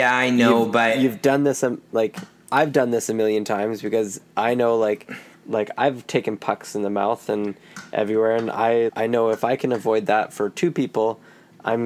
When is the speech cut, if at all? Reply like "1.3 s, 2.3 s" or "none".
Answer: 5.3 s, 8.9 s